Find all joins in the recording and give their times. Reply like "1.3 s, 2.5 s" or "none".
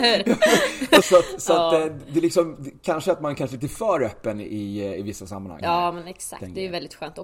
1.0 s, 5.6 s